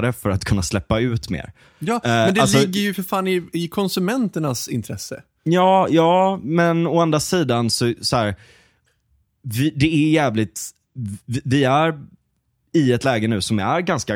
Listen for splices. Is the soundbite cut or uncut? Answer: uncut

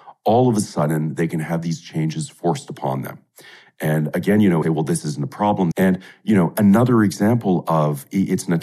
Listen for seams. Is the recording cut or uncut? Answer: cut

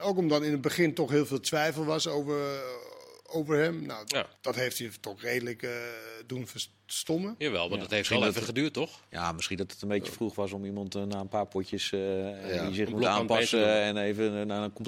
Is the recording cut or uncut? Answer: cut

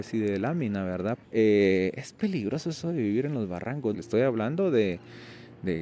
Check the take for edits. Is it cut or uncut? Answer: cut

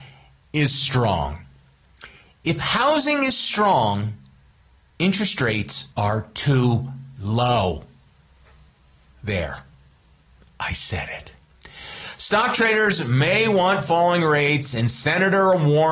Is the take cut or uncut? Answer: cut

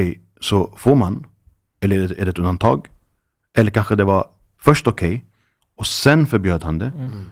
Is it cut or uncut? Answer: uncut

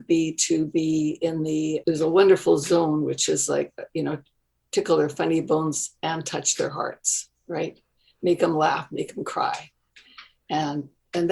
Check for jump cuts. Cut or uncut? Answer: uncut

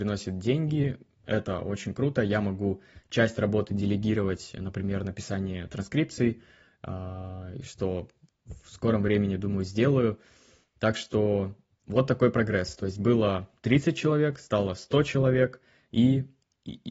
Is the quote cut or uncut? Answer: uncut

